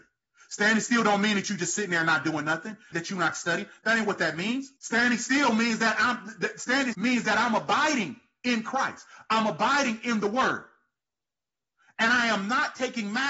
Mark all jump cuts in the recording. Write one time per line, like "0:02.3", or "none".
0:02.9
0:04.8
0:06.9